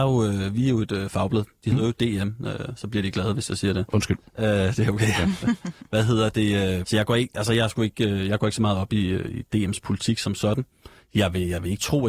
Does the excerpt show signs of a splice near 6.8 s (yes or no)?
yes